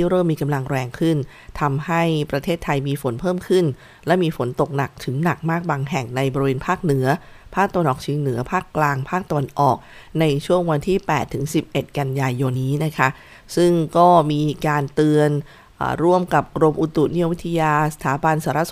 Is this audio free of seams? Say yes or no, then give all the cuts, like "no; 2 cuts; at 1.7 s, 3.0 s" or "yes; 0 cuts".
no; 1 cut; at 12.5 s